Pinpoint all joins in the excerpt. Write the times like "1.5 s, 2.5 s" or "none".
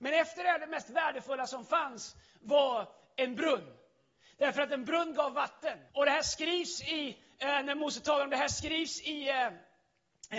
5.9 s

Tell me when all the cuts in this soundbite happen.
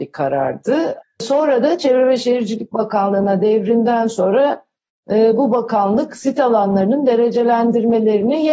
1.0 s

